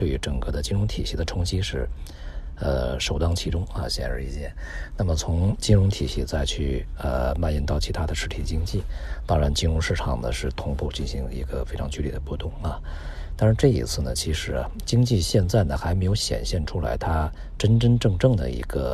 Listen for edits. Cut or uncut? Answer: uncut